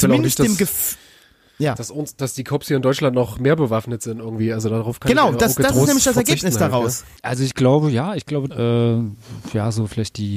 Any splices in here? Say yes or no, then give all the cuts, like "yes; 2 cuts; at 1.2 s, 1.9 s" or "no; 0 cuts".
yes; 2 cuts; at 7.2 s, 8.5 s